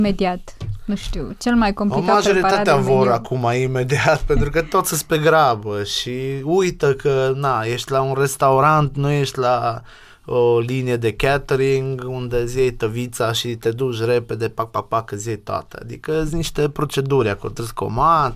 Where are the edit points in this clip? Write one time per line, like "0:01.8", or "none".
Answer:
none